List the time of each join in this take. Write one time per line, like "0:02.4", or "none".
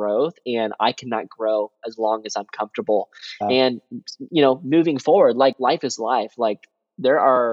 0:03.4